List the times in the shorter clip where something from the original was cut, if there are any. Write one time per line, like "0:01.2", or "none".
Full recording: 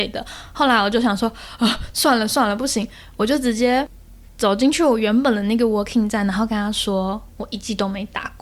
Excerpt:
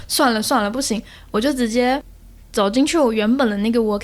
none